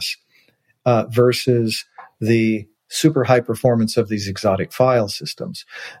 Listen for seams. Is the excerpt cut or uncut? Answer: uncut